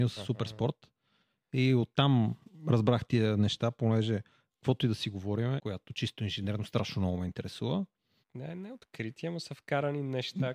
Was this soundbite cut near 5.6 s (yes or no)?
yes